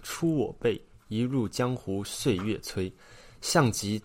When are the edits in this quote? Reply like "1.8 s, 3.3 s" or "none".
none